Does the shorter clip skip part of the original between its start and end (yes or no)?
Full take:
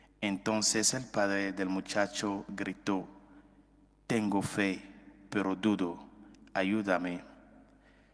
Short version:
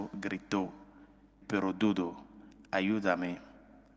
yes